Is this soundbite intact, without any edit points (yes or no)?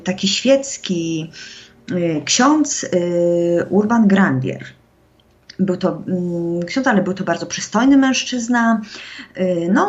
yes